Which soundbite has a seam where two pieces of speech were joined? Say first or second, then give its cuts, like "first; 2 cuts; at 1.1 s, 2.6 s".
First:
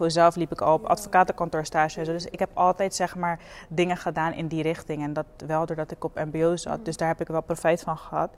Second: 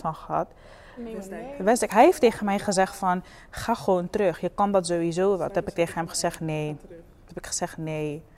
second; 1 cut; at 1.0 s